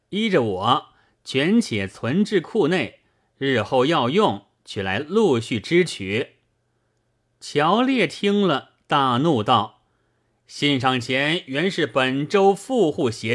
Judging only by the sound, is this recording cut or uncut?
uncut